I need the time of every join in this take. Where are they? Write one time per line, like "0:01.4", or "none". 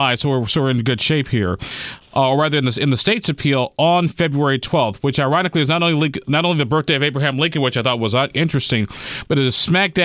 0:02.0